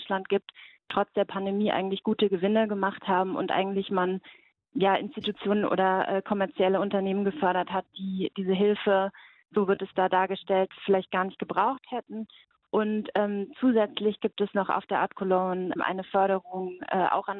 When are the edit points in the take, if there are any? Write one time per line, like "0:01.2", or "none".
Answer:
0:04.6
0:15.8